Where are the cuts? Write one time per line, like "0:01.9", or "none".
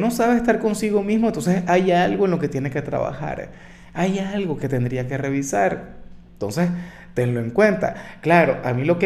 none